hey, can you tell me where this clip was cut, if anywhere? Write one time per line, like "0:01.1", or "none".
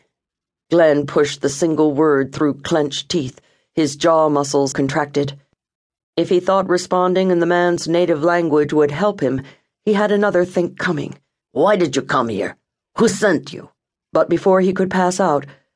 0:04.7
0:11.4
0:14.0